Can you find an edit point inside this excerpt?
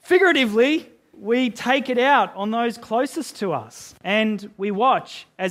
yes; 1 cut; at 1.1 s

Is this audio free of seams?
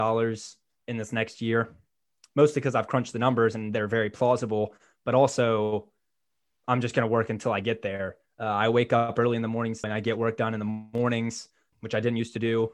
no; 3 cuts; at 8.3 s, 9.8 s, 11.7 s

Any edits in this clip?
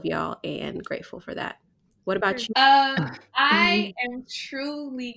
yes; 1 cut; at 2.5 s

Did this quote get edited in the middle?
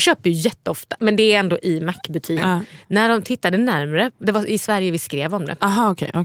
yes; 1 cut; at 2.4 s

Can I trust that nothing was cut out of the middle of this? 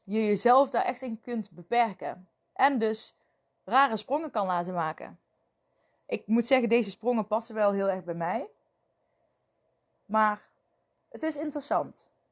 yes; 0 cuts

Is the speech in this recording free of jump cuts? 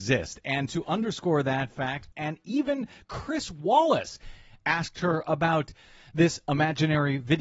no; 1 cut; at 2.1 s

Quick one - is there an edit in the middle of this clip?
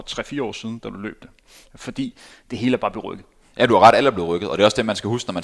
no; 0 cuts

